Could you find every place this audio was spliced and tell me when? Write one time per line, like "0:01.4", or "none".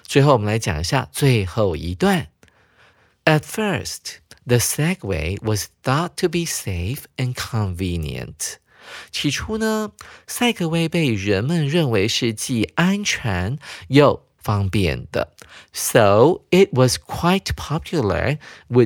none

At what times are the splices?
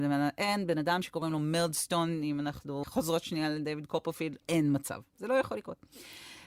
0:02.8
0:04.4

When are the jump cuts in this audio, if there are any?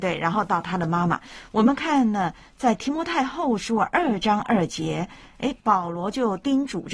none

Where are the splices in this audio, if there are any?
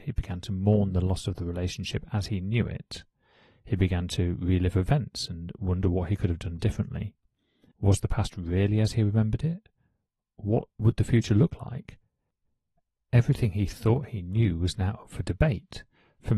0:07.7

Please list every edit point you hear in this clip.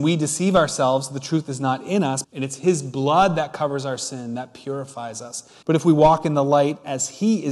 0:02.2
0:05.6

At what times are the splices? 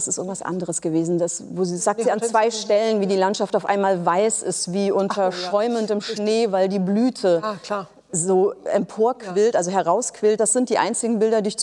none

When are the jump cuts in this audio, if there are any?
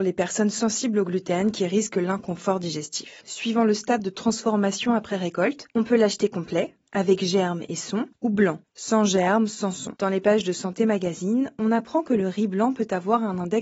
0:03.2
0:10.0

